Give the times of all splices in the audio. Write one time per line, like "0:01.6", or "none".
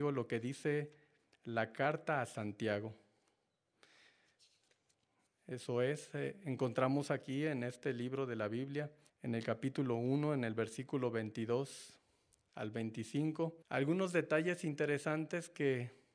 0:09.1
0:13.6